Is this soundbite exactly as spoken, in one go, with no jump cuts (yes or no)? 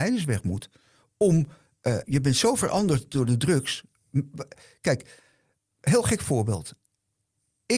no